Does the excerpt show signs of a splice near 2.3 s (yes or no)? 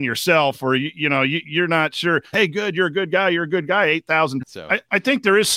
yes